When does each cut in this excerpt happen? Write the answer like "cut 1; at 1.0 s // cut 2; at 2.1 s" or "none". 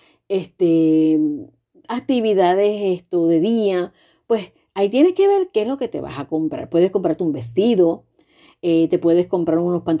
none